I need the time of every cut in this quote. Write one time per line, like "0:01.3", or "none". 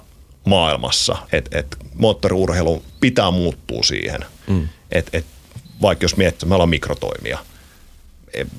0:01.3
0:04.4
0:06.4